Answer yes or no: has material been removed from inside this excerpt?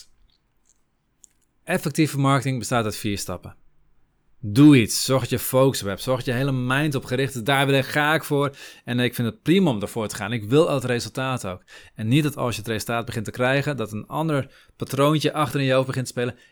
no